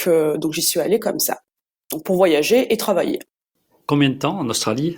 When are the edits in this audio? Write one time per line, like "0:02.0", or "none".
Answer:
none